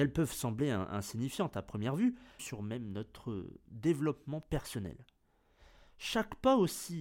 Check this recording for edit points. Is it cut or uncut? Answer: cut